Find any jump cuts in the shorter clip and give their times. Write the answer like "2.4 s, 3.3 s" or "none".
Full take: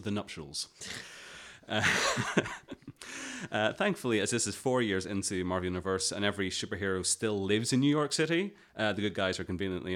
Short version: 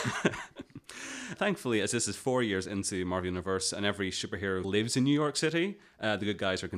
1.4 s, 4.6 s